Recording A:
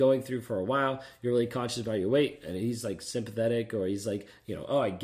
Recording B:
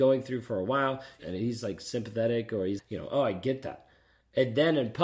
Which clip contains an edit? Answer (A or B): B